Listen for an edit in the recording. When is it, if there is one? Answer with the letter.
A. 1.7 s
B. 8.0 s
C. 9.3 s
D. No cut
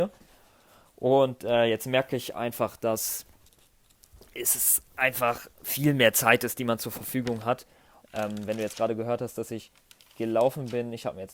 B